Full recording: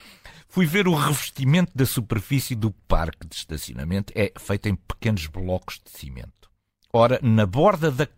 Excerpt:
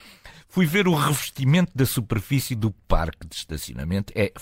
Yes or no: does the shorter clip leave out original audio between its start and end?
no